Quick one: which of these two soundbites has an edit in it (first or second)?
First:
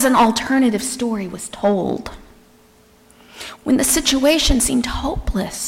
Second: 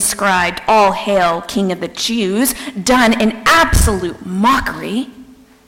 first